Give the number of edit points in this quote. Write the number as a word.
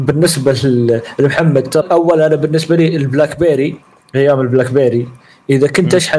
one